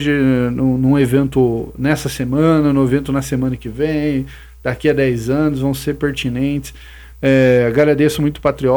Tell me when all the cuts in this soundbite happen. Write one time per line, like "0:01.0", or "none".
0:07.1